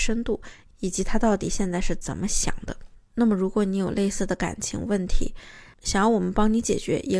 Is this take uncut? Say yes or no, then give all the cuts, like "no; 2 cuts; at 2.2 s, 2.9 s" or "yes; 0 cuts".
yes; 0 cuts